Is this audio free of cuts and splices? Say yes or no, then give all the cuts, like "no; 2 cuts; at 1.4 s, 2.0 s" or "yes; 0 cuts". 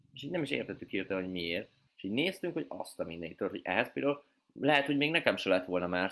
no; 1 cut; at 1.9 s